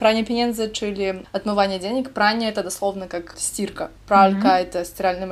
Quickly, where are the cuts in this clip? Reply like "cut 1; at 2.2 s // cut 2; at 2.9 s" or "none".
cut 1; at 3.3 s